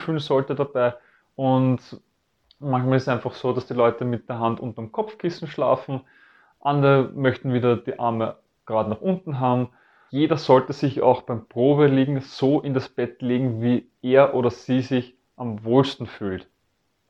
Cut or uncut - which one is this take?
cut